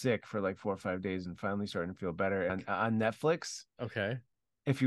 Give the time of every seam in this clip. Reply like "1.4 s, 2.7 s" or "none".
2.5 s